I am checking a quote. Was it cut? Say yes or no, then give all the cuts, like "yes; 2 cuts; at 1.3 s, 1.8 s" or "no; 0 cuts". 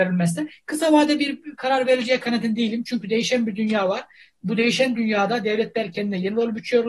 no; 0 cuts